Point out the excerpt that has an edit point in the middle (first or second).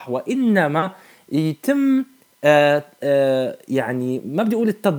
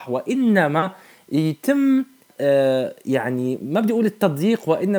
second